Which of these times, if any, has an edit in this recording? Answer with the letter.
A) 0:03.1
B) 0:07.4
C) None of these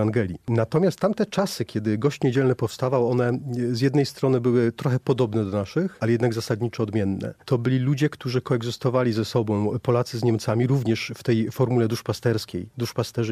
B